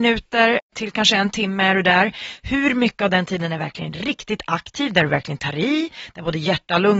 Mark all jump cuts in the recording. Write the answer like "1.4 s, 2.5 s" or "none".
none